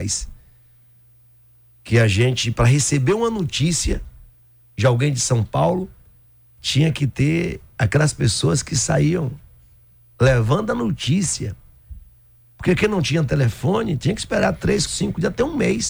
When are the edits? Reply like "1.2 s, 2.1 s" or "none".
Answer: 14.9 s